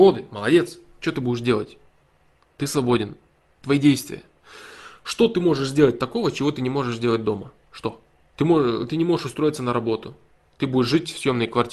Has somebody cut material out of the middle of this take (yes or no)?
yes